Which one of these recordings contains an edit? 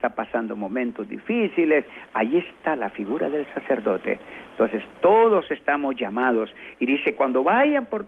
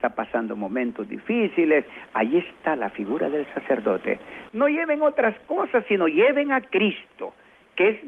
second; 1 cut; at 4.5 s

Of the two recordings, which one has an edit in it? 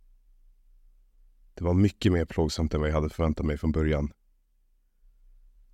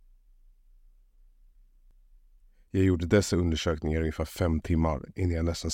first; 1 cut; at 1.5 s

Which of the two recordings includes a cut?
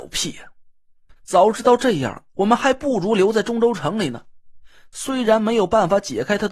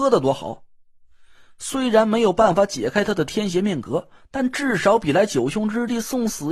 first; 2 cuts; at 1.2 s, 4.9 s

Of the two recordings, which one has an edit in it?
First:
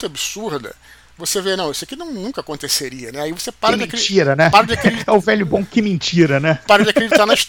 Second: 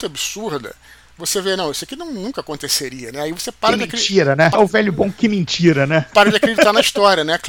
second; 1 cut; at 4.5 s

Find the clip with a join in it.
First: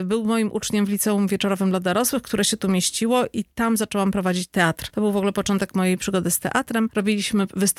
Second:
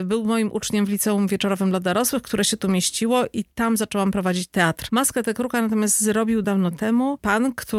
second; 2 cuts; at 4.9 s, 6.4 s

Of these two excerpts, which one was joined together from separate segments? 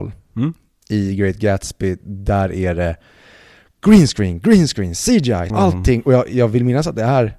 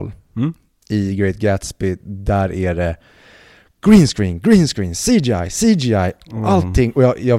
first; 1 cut; at 5.5 s

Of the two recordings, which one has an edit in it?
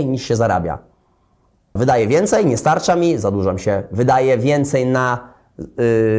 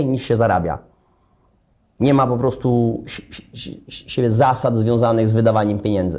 first; 1 cut; at 1.8 s

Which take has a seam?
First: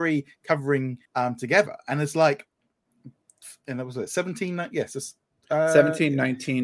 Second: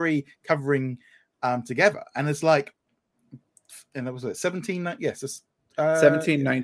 first; 1 cut; at 1.1 s

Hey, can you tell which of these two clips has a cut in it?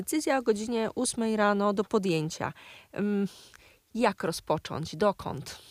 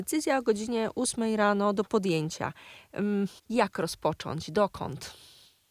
second; 1 cut; at 3.4 s

